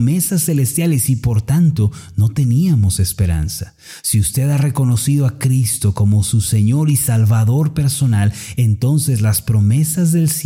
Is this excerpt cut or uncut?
uncut